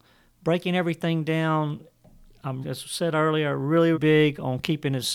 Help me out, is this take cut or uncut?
cut